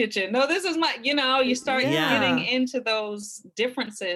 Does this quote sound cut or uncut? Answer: uncut